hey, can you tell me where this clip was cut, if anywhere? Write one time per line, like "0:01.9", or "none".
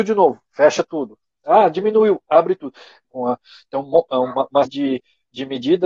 0:03.0
0:04.6